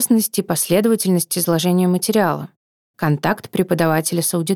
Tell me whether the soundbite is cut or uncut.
uncut